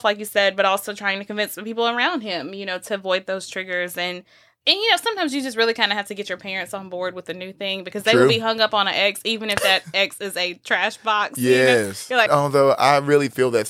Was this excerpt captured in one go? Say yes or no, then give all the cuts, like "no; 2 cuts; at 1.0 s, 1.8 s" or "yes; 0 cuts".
no; 1 cut; at 12.3 s